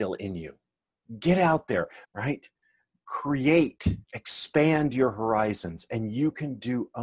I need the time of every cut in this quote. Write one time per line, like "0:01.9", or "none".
0:02.0
0:04.0